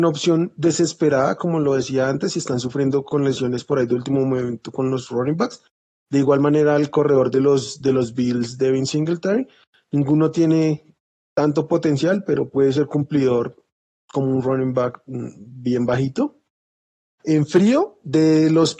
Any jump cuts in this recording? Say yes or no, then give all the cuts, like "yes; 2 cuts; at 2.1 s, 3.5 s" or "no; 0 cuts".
yes; 1 cut; at 17.2 s